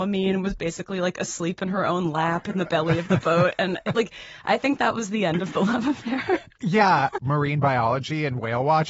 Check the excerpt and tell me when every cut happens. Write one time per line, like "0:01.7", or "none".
0:07.2